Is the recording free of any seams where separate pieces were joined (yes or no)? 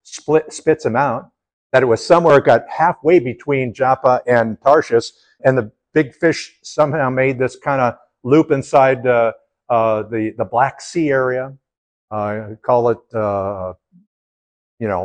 no